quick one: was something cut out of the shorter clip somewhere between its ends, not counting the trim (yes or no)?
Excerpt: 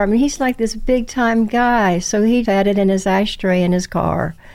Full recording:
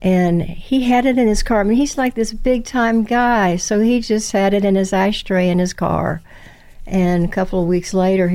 yes